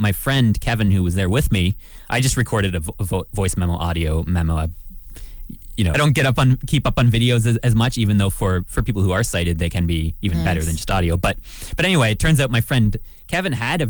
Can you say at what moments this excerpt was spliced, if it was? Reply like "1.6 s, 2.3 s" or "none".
5.9 s